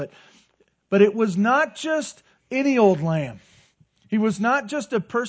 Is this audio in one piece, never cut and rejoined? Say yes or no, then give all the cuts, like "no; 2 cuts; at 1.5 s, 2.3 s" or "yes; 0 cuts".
yes; 0 cuts